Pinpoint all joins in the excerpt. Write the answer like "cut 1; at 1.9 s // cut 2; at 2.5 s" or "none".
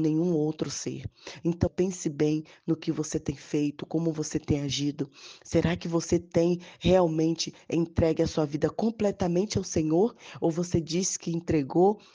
cut 1; at 1.7 s

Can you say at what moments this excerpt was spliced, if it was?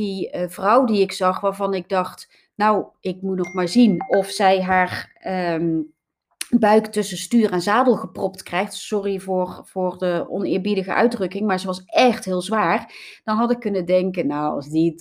none

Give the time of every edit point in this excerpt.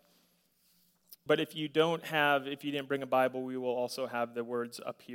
cut 1; at 1.3 s

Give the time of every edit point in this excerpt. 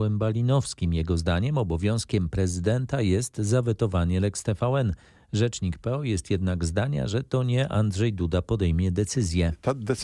none

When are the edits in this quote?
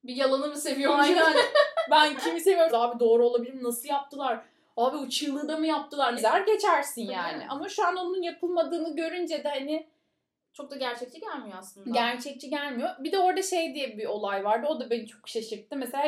cut 1; at 2.7 s // cut 2; at 6.2 s

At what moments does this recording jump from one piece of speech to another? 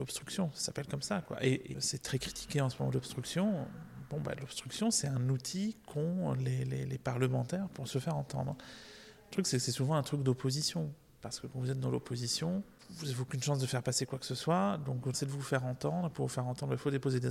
cut 1; at 15.1 s

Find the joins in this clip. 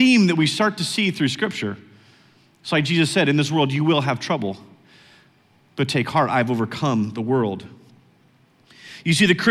none

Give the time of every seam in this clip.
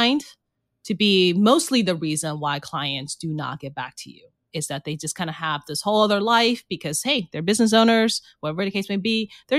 none

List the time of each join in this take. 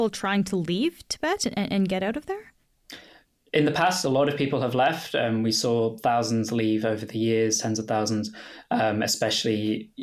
none

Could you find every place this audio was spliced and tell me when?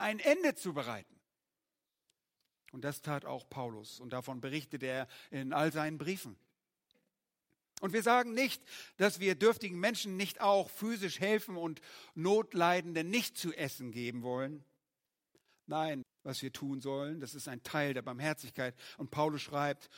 cut 1; at 16.0 s

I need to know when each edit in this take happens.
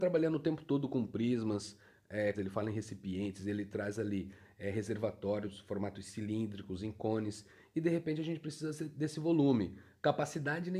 cut 1; at 2.3 s

